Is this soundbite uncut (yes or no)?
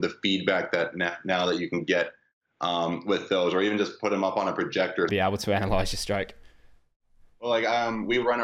no